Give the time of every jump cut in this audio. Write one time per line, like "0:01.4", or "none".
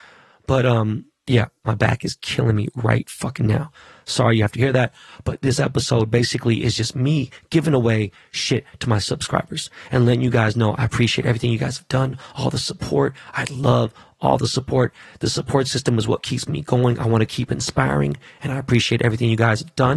none